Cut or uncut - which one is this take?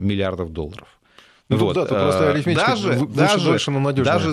uncut